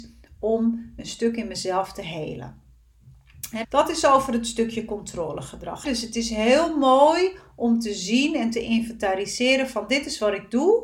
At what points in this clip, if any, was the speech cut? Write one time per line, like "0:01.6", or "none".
0:03.6
0:05.8